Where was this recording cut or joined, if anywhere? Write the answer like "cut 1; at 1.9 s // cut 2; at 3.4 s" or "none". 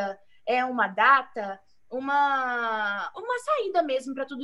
cut 1; at 3.1 s